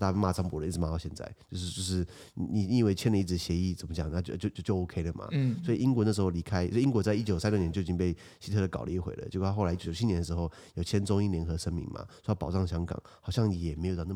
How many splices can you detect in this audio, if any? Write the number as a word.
zero